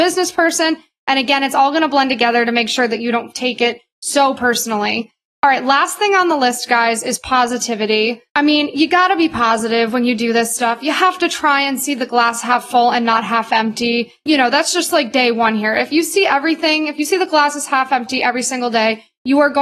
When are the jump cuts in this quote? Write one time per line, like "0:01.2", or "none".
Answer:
0:08.3